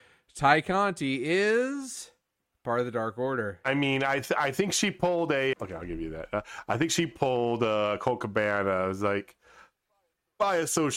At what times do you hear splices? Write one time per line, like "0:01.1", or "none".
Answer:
0:05.5

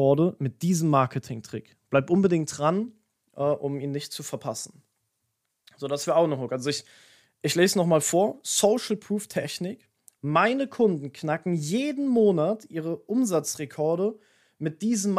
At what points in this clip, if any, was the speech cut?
none

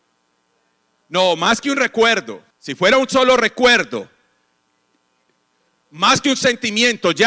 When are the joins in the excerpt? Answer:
0:02.5

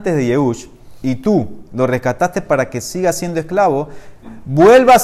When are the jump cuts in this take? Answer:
none

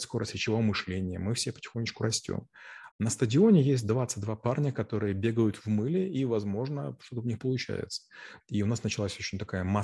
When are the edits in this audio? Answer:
0:02.9
0:08.4

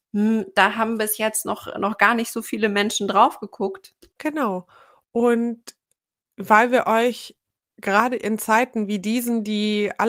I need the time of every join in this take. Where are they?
0:04.1

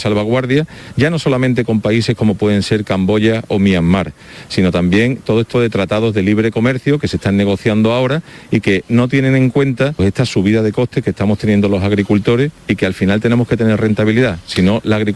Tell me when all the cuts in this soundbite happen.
0:05.5
0:10.0

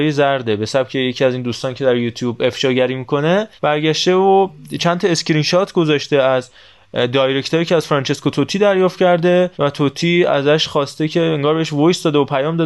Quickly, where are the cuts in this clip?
0:03.6
0:09.5

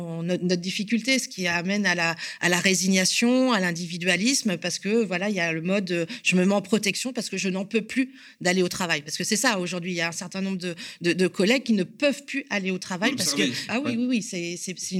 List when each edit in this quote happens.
0:13.7

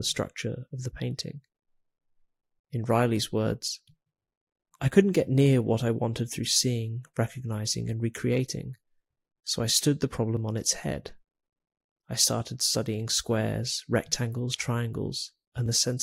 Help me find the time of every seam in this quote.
0:02.6

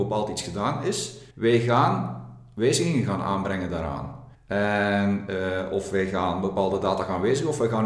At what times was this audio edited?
0:01.3
0:04.3

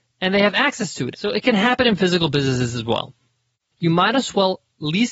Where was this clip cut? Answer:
0:01.1
0:03.7

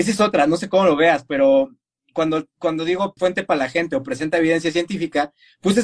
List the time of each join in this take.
0:03.2

